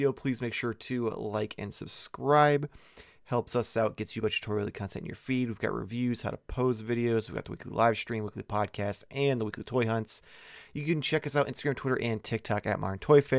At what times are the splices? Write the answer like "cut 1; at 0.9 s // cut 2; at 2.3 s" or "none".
none